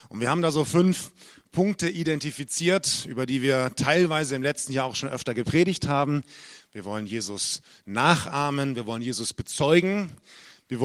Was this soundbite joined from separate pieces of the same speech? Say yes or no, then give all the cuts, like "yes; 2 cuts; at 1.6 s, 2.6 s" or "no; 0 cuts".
yes; 1 cut; at 6.6 s